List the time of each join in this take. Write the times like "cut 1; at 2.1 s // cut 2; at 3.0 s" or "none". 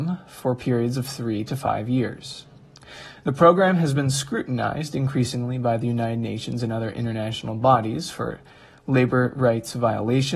none